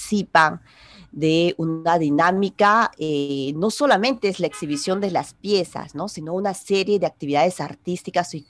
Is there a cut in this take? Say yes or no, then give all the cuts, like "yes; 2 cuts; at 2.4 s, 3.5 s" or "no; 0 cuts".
no; 0 cuts